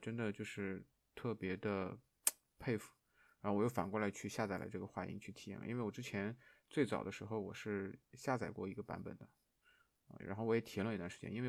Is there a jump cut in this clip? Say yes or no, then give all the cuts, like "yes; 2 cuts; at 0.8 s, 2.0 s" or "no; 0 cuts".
no; 0 cuts